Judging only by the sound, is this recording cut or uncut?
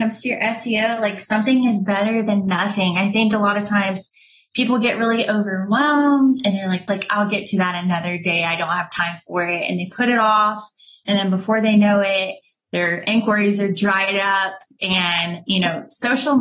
cut